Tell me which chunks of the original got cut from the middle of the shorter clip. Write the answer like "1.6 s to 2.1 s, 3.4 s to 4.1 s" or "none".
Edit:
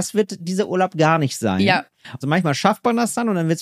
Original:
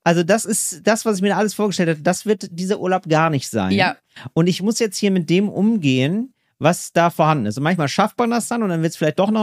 4.3 s to 7.5 s

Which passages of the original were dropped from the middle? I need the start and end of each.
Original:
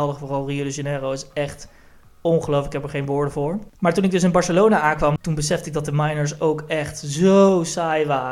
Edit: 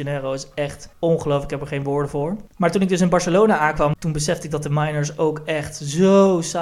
1.7 s to 2.1 s

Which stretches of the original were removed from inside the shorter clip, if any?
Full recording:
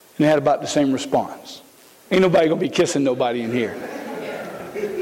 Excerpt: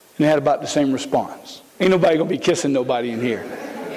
1.7 s to 2.0 s

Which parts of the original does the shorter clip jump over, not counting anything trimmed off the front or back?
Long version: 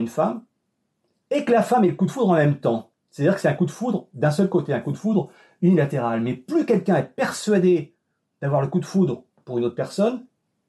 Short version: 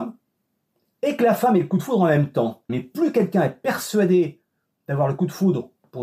3.0 s to 6.2 s

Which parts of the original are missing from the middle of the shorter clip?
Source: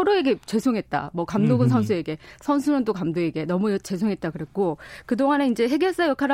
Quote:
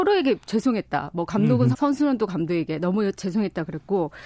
1.7 s to 2.4 s

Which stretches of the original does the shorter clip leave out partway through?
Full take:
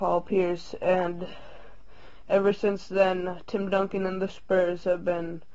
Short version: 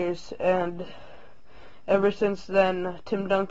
none

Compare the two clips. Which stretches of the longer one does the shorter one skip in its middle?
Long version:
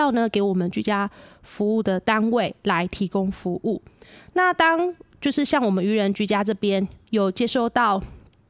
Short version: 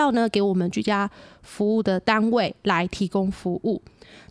none

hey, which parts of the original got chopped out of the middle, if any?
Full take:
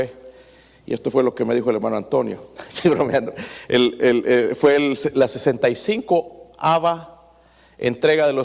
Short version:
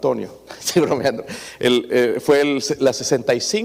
4.0 s to 4.2 s

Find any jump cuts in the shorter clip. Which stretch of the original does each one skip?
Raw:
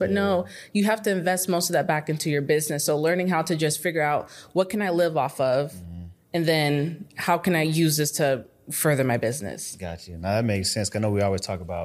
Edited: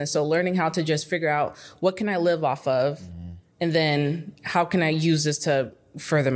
none

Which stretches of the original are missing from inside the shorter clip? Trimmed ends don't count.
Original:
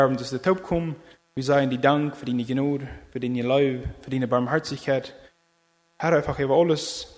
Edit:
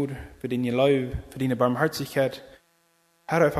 none

